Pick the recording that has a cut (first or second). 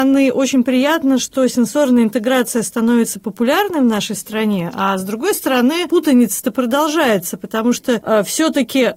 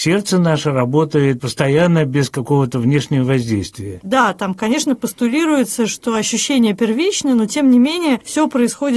second